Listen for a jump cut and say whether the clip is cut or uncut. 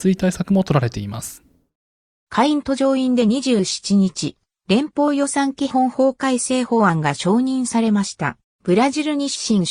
cut